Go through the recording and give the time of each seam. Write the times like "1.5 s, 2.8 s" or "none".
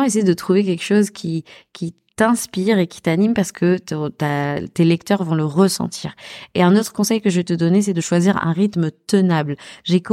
none